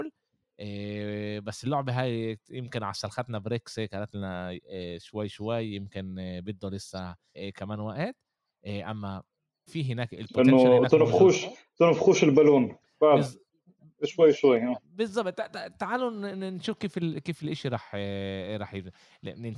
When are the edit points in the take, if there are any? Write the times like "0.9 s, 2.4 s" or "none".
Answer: 7.3 s, 9.7 s